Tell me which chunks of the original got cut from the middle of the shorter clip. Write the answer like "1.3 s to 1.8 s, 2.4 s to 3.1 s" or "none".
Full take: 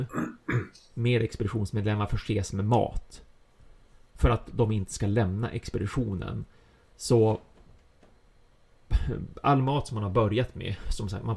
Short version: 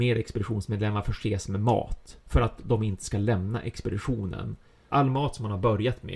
3.3 s to 4.1 s, 6.8 s to 9.4 s